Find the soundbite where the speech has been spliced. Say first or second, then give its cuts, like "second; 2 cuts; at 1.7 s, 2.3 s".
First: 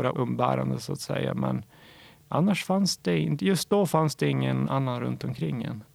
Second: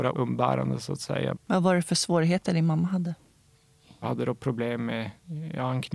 second; 2 cuts; at 1.3 s, 4.0 s